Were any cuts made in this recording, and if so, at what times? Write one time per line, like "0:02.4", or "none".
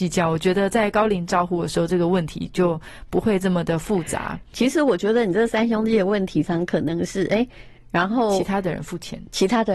0:04.5
0:06.4
0:07.8